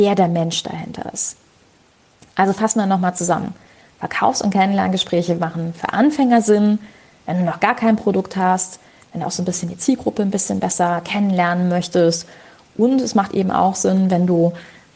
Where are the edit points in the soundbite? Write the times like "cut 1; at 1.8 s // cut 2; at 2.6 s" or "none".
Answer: none